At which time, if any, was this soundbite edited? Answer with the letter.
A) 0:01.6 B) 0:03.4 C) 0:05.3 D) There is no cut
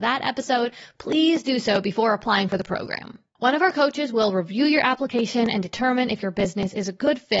B